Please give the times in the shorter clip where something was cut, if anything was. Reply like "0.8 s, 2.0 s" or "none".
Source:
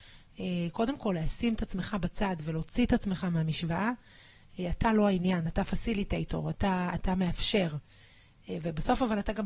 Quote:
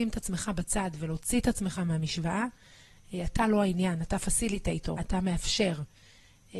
5.0 s